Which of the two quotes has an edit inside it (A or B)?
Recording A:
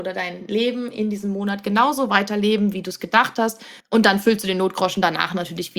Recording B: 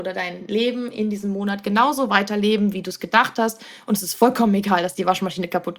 A